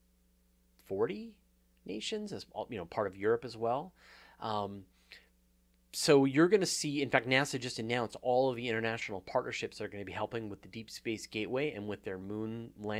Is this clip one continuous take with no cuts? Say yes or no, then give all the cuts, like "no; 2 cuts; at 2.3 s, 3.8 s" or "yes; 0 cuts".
yes; 0 cuts